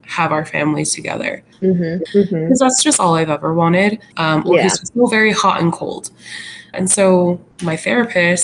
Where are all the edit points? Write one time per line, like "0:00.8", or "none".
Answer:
0:02.1
0:04.1
0:06.7

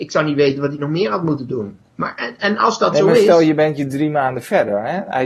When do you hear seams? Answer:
none

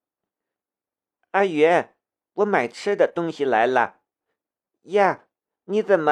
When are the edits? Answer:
none

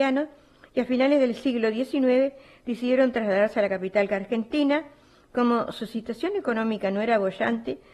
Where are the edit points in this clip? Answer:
none

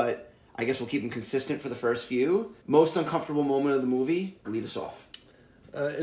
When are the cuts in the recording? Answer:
0:02.6
0:04.4

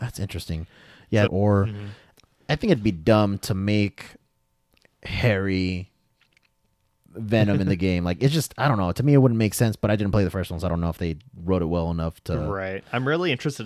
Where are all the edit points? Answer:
0:01.3

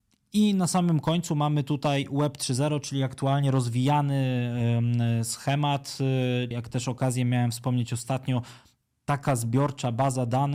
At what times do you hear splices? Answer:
0:06.5

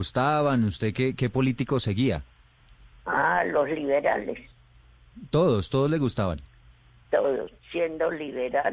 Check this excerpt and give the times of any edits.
none

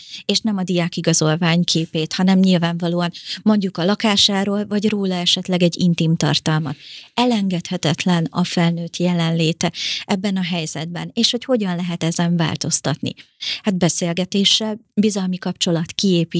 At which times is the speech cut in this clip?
none

